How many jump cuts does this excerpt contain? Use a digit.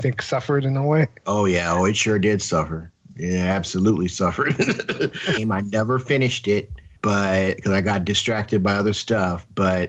2